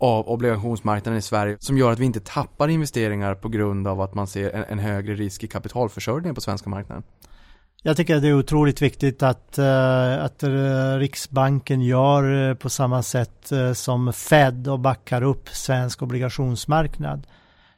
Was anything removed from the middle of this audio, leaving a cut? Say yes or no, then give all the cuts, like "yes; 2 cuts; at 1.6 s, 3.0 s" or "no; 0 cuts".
no; 0 cuts